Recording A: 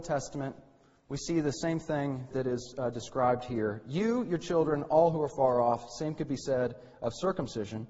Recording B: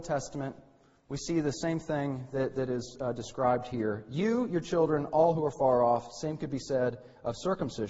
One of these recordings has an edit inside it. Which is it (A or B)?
A